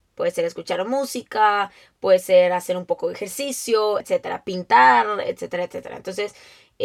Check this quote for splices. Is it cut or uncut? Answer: cut